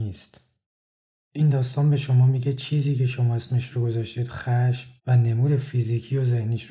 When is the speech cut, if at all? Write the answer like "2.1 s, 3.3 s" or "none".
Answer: 1.2 s, 5.0 s